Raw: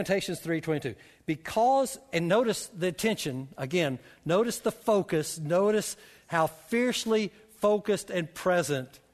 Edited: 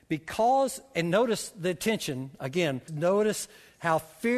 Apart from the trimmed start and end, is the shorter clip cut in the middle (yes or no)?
yes